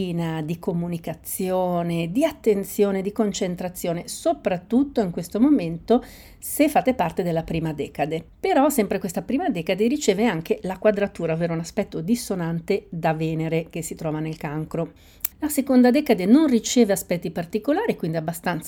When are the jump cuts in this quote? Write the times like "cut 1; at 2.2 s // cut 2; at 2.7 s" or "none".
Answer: cut 1; at 15.3 s